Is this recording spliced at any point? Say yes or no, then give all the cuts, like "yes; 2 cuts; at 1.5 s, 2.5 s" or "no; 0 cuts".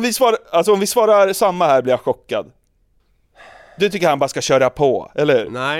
no; 0 cuts